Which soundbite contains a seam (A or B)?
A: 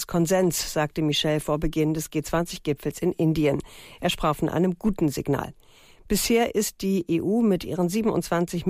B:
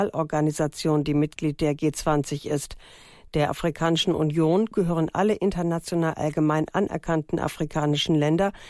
B